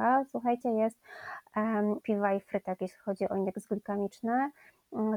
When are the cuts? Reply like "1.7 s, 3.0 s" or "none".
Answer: 2.0 s